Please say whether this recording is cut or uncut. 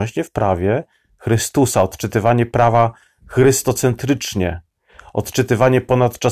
uncut